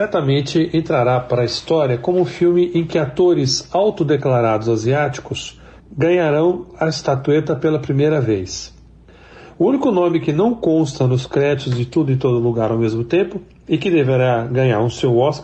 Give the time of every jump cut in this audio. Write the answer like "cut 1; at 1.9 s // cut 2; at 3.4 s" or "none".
cut 1; at 5.8 s